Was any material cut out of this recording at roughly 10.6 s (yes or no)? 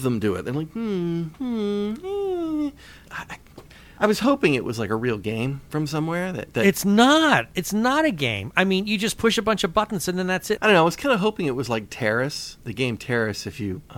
yes